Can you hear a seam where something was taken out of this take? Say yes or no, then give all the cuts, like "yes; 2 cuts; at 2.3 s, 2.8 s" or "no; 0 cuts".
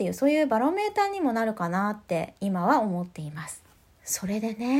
no; 0 cuts